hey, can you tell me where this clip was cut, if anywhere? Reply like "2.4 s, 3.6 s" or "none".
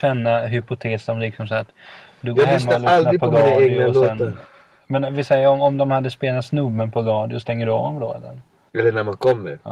8.7 s